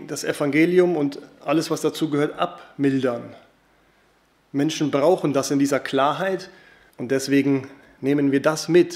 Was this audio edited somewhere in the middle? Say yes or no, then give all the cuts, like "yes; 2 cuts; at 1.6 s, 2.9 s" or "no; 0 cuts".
yes; 1 cut; at 6.9 s